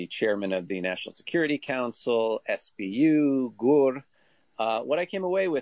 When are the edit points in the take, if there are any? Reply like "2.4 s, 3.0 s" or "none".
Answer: none